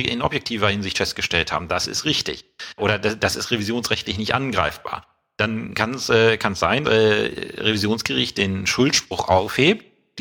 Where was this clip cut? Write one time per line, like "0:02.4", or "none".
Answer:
0:02.8
0:06.8